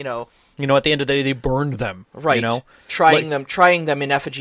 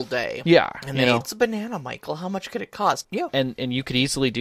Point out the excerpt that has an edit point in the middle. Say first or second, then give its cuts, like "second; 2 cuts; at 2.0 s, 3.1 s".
second; 2 cuts; at 1.2 s, 3.0 s